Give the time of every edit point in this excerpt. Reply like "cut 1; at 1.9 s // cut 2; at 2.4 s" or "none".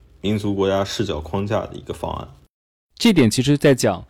none